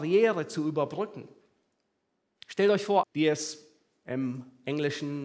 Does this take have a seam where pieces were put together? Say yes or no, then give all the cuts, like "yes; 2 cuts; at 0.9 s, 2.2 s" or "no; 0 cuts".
yes; 1 cut; at 3.0 s